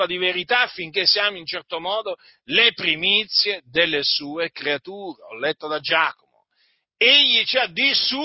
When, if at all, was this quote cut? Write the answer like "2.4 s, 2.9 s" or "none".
none